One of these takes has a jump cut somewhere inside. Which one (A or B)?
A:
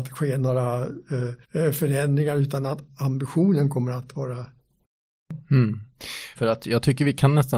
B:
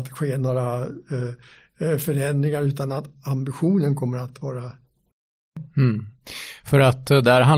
A